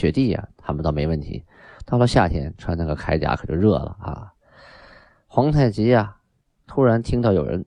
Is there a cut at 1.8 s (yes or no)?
no